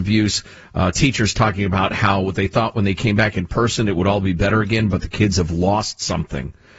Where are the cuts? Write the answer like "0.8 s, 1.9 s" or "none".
none